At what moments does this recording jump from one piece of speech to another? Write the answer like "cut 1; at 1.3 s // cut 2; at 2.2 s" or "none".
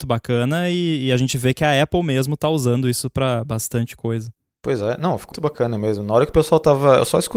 cut 1; at 5.3 s